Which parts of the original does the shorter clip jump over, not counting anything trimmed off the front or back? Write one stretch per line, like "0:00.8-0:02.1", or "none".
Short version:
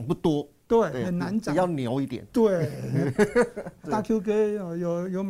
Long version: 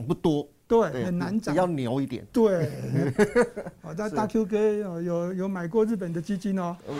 0:03.8-0:04.1